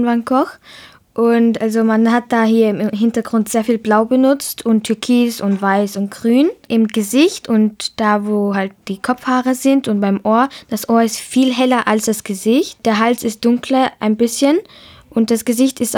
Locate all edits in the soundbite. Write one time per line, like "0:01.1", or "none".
none